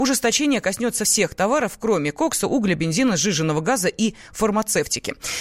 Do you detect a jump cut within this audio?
no; 0 cuts

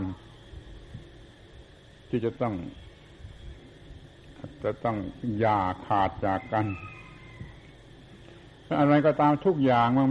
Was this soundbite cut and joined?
no; 0 cuts

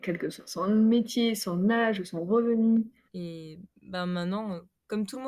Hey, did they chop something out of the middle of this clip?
yes; 1 cut; at 3.1 s

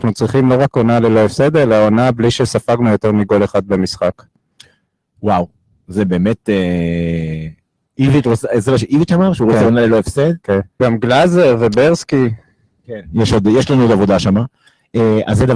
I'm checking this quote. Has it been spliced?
yes; 2 cuts; at 7.8 s, 10.8 s

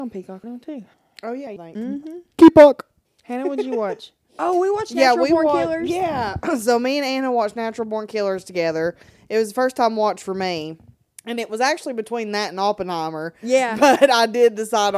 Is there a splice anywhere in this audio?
no; 0 cuts

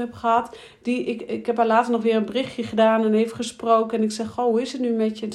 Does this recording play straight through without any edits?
yes; 0 cuts

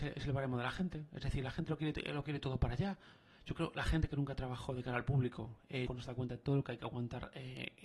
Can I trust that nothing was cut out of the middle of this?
no; 1 cut; at 5.9 s

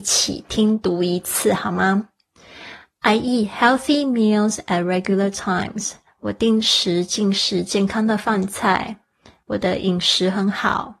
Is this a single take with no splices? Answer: no; 1 cut; at 9.4 s

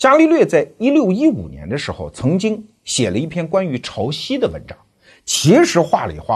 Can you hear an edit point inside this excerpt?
no; 0 cuts

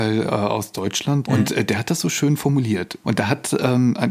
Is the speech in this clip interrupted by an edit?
yes; 2 cuts; at 1.2 s, 3.0 s

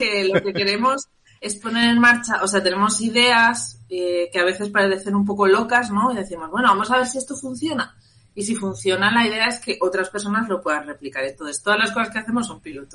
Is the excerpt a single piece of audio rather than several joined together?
yes; 0 cuts

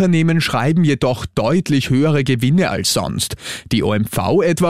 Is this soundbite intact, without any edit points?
yes; 0 cuts

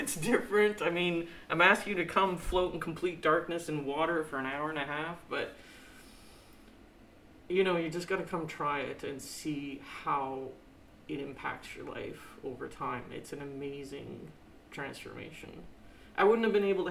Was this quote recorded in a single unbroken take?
yes; 0 cuts

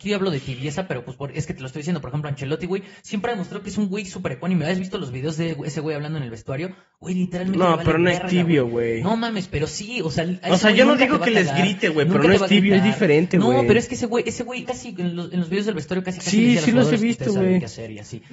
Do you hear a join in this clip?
yes; 1 cut; at 14.6 s

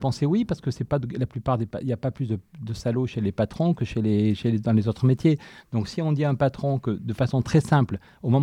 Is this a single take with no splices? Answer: yes; 0 cuts

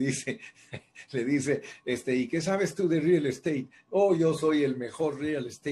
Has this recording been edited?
no; 0 cuts

